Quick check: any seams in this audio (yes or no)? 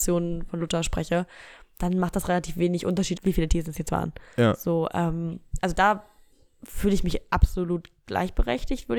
yes